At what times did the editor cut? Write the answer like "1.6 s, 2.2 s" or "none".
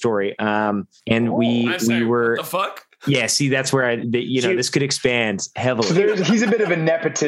1.0 s